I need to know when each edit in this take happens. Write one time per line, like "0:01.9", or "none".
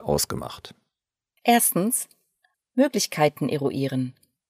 0:02.5